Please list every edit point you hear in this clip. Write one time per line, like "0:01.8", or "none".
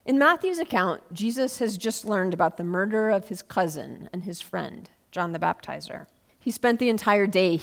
0:06.3